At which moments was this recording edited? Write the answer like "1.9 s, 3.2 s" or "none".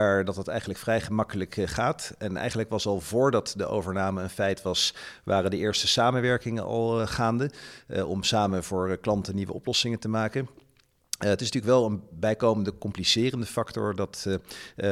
none